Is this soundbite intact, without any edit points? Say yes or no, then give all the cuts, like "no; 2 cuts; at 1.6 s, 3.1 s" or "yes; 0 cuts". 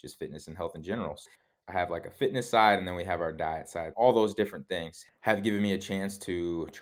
no; 2 cuts; at 1.6 s, 3.9 s